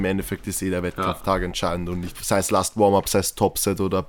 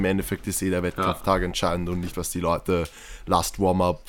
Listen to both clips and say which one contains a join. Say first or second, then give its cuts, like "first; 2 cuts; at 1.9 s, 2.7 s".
first; 1 cut; at 2.1 s